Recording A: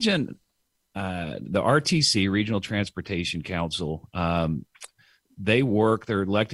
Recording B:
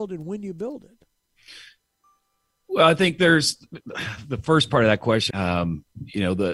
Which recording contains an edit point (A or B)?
B